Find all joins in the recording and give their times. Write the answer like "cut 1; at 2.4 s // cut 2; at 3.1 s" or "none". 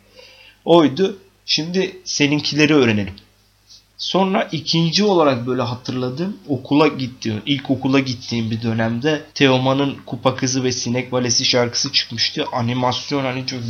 cut 1; at 3.9 s // cut 2; at 9.3 s